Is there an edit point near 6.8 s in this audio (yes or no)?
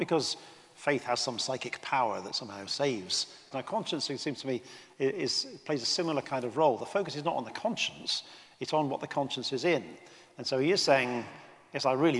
no